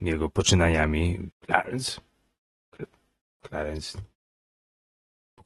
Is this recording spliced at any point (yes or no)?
yes